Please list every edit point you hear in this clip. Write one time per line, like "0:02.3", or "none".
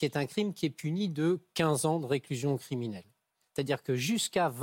0:03.4

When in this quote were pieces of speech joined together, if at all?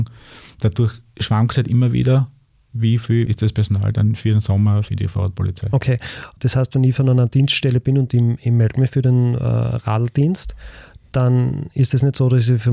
0:03.3

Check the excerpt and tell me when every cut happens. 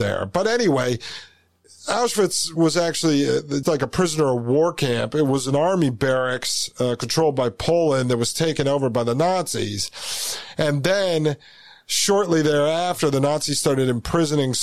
0:03.6

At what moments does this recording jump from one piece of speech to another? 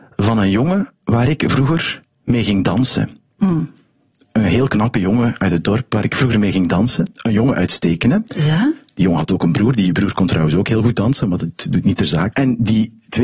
0:12.3

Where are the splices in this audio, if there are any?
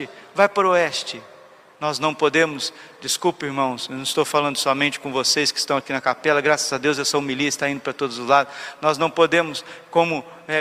none

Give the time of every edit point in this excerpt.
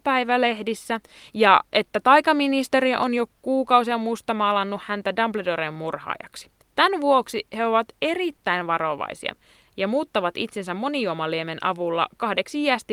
0:06.6

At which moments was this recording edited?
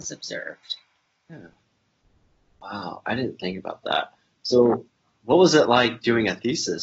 none

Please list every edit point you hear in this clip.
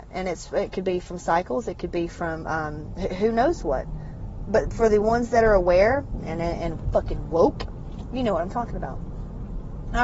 0:06.2

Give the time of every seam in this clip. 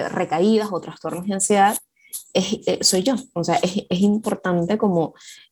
none

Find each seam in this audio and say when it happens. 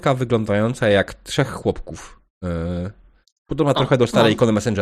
none

